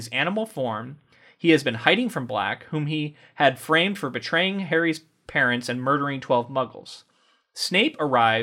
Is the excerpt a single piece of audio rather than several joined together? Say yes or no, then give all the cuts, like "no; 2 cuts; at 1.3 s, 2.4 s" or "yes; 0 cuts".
yes; 0 cuts